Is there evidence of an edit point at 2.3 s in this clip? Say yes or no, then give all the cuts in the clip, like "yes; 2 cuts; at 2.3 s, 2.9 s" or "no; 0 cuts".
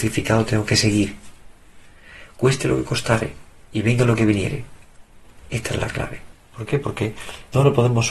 no; 1 cut; at 6.3 s